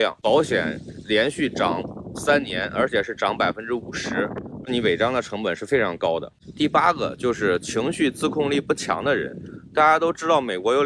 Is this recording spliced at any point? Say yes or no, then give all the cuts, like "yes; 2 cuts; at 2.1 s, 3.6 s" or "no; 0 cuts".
yes; 1 cut; at 4.6 s